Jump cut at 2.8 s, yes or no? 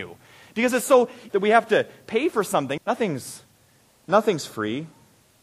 yes